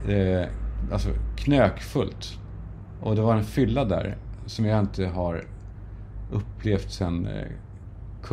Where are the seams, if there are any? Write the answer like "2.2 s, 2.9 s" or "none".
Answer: none